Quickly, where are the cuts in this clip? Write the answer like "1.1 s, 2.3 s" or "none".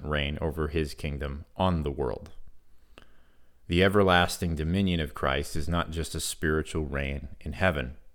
none